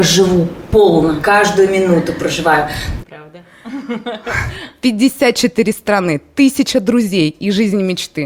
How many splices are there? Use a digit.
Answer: 2